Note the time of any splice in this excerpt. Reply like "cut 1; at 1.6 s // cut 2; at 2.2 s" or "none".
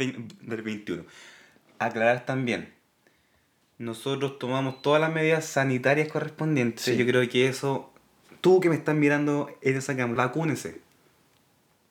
cut 1; at 10.2 s